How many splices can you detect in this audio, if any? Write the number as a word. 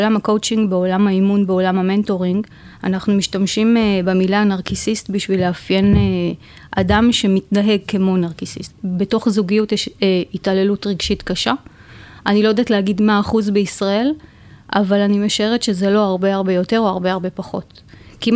one